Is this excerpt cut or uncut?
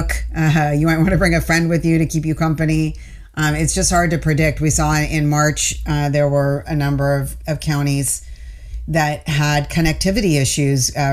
uncut